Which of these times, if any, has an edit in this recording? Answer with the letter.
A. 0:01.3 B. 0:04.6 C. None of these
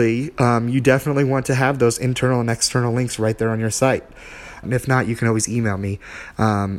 B